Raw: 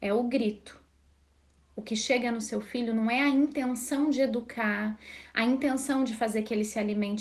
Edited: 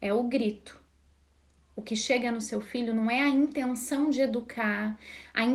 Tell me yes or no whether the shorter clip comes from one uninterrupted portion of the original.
yes